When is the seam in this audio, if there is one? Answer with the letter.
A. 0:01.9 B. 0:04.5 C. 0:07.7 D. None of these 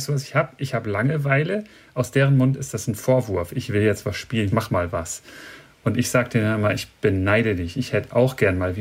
B